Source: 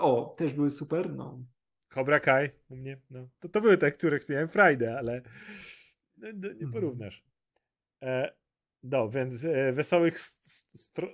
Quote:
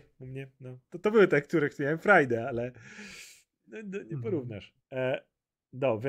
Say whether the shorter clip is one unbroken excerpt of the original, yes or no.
no